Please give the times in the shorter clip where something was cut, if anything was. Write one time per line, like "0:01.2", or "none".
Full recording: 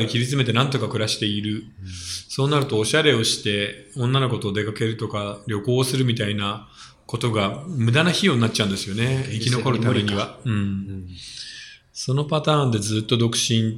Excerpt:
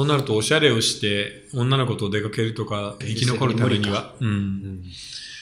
0:03.0